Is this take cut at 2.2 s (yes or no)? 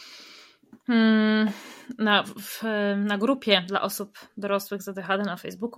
yes